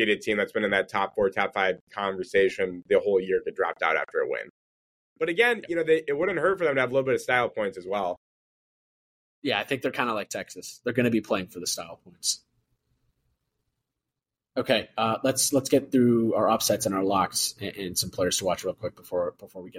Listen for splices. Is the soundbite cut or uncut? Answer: uncut